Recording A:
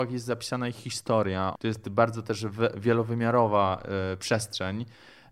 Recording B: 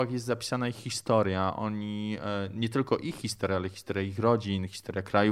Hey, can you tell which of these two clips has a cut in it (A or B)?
A